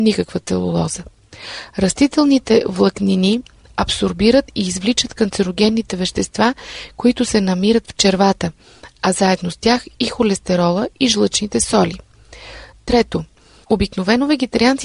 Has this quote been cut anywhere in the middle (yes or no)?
no